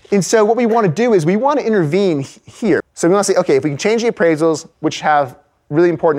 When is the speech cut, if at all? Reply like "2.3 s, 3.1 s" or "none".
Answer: 2.8 s, 4.7 s